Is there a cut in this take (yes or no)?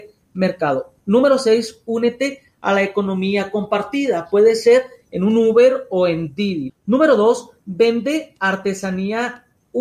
yes